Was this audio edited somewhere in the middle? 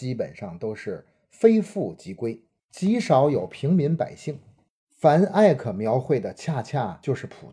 no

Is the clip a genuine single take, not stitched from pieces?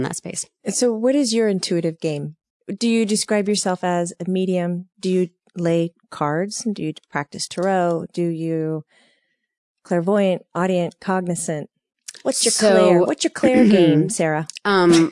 yes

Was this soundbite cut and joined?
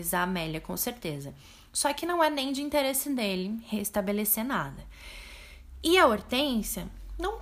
no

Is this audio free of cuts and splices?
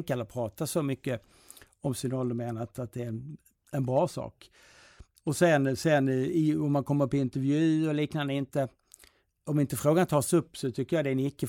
yes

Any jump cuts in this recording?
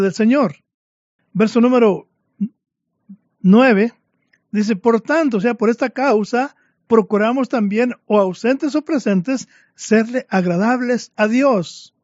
yes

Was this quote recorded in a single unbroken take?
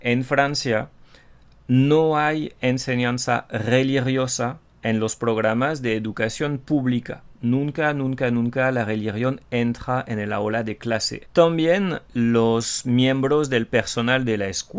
no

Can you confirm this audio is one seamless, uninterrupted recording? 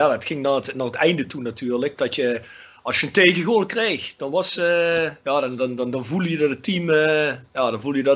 yes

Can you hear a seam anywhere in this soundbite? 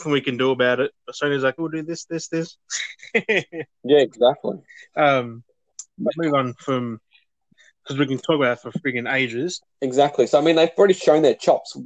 yes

